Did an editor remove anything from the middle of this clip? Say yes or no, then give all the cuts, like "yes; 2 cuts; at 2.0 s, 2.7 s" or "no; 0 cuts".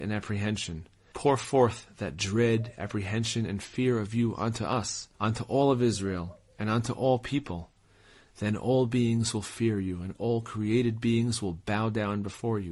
yes; 2 cuts; at 1.1 s, 5.1 s